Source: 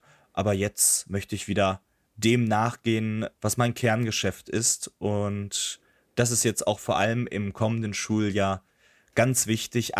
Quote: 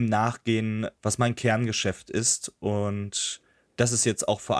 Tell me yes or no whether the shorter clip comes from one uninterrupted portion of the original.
yes